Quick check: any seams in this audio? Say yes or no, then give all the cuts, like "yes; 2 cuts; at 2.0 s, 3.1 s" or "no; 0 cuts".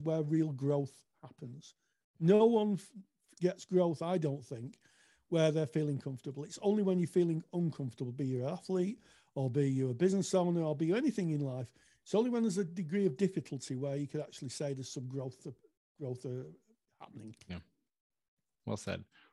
no; 0 cuts